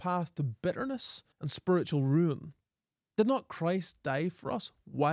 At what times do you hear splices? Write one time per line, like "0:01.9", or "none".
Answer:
0:01.3